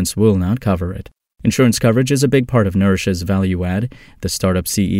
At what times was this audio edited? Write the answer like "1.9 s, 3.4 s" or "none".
none

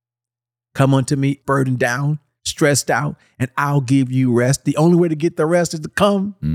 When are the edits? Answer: 1.4 s

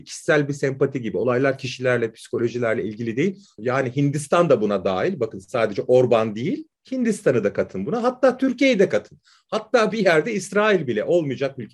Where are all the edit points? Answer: 3.6 s

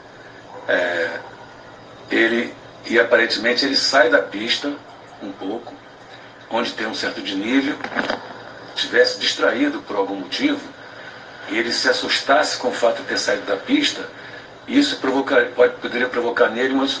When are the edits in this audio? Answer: 8.7 s

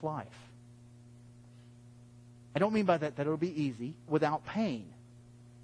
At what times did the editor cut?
4.1 s

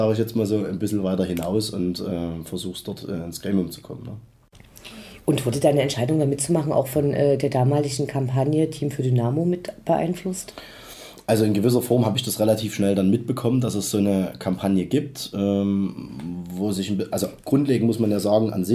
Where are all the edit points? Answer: none

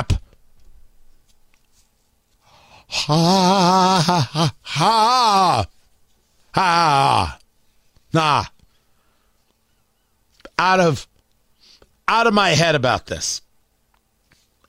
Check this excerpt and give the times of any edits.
none

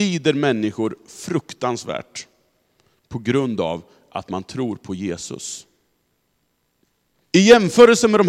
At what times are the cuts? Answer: 7.2 s

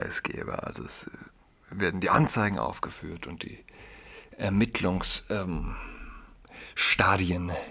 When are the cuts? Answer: none

